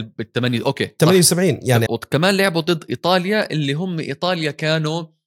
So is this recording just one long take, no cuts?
no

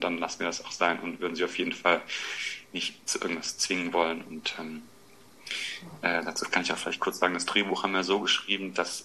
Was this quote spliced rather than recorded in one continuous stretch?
no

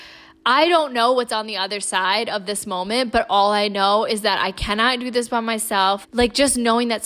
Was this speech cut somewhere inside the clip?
yes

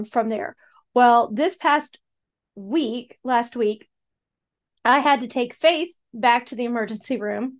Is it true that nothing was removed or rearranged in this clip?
yes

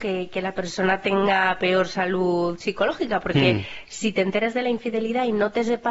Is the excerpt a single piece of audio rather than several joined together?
yes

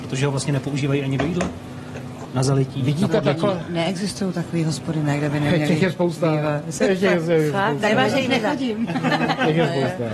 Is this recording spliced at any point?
no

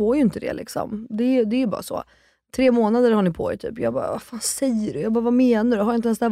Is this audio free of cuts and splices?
yes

